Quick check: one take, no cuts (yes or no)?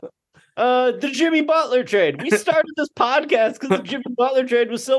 yes